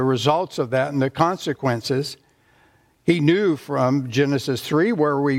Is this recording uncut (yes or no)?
yes